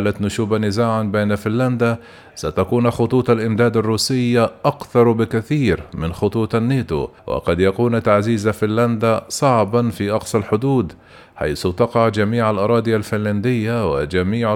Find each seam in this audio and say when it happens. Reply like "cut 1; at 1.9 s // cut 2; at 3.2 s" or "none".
cut 1; at 7.2 s